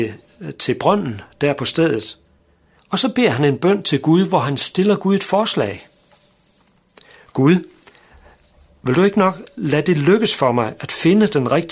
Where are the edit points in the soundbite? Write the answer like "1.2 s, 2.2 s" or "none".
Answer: 2.8 s